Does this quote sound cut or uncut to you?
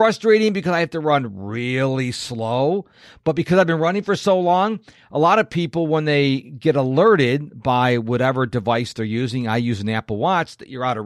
uncut